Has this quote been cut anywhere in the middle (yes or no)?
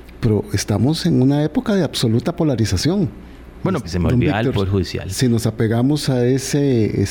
yes